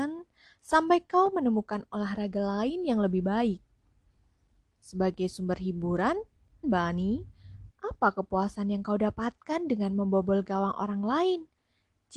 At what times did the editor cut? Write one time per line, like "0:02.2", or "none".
0:06.6
0:07.7